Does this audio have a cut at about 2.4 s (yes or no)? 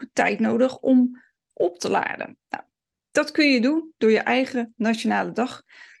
no